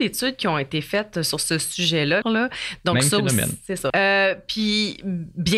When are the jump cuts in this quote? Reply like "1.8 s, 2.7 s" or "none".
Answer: 2.2 s, 3.9 s